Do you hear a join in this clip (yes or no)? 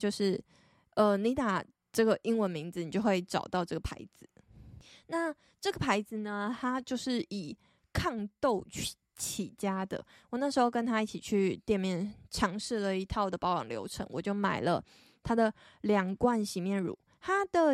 no